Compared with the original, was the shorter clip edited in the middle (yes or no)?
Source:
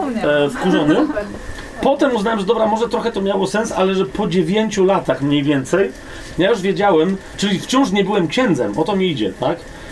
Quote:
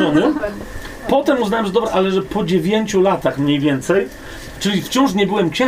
yes